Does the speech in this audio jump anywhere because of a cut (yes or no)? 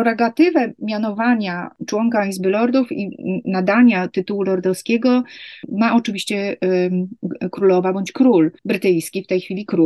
yes